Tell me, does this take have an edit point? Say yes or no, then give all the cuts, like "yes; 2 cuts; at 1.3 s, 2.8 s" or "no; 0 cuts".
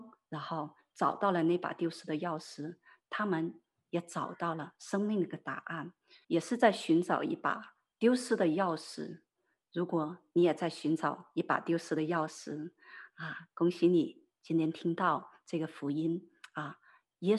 yes; 1 cut; at 6.2 s